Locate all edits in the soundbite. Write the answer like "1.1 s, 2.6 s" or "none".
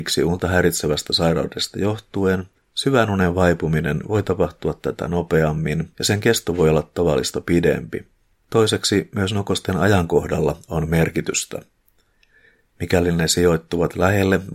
8.4 s